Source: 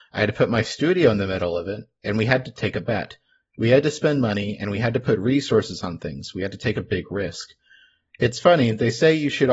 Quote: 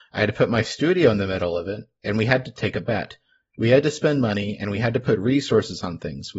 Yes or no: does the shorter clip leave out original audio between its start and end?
no